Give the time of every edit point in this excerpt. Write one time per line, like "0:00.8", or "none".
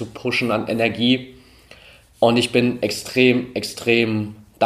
none